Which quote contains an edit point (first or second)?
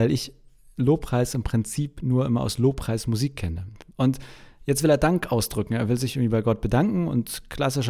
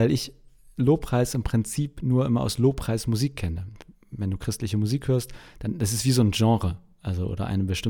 first